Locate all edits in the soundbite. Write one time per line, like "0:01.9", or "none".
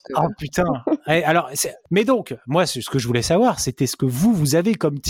none